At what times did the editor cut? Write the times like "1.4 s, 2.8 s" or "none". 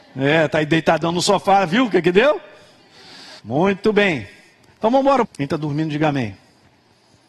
3.4 s, 5.2 s